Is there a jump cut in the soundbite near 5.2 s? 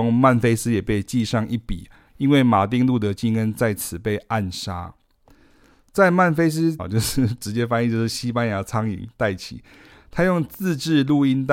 no; 1 cut; at 6.8 s

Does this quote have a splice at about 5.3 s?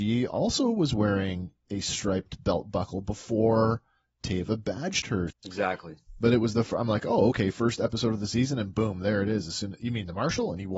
yes; 1 cut; at 5.3 s

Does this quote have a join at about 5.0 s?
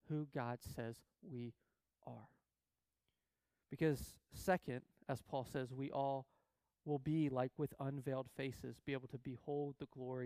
no; 0 cuts

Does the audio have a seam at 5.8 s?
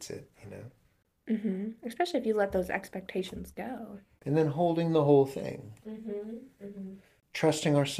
yes; 1 cut; at 5.8 s

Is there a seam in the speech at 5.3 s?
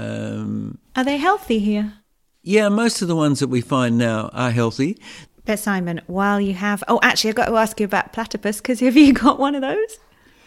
yes; 1 cut; at 5.3 s

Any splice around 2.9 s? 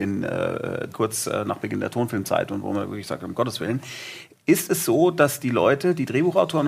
no; 1 cut; at 0.9 s

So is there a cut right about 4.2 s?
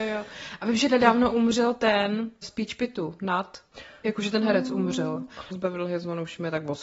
no; 2 cuts; at 2.4 s, 5.5 s

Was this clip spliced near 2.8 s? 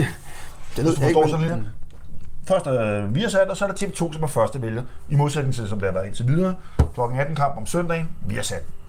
no; 1 cut; at 1.5 s

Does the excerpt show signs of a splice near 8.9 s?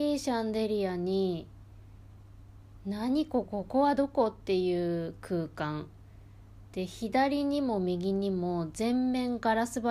no; 1 cut; at 3.4 s

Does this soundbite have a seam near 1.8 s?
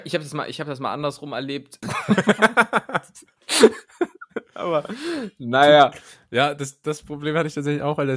yes; 1 cut; at 1.8 s

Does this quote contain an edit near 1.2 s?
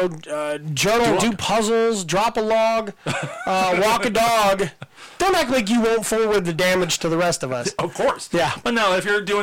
yes; 2 cuts; at 1.2 s, 5.2 s

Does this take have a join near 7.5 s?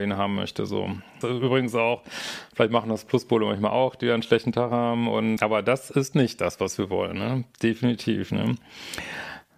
no; 2 cuts; at 1.2 s, 5.4 s

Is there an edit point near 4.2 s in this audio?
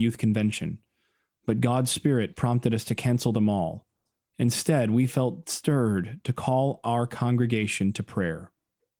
no; 0 cuts

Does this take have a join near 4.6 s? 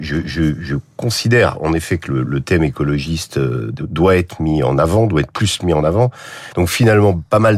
no; 2 cuts; at 2.3 s, 6.5 s

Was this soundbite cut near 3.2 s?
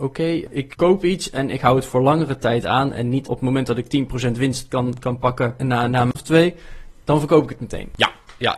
yes; 1 cut; at 3.2 s

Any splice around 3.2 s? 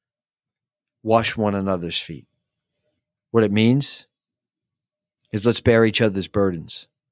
yes; 1 cut; at 3.2 s

